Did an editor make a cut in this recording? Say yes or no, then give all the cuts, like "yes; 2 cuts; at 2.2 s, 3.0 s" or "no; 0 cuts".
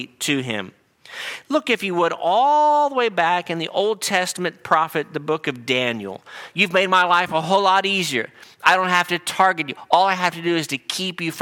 yes; 1 cut; at 6.5 s